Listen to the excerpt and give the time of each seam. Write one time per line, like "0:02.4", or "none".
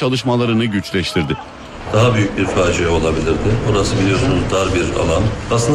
none